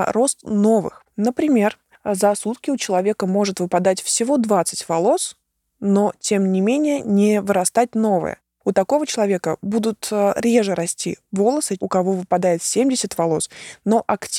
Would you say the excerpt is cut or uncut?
cut